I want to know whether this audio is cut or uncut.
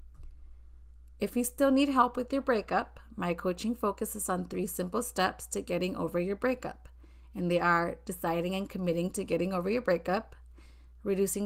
uncut